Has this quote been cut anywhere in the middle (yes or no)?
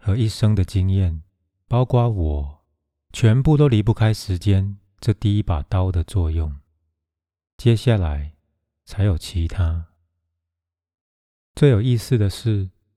no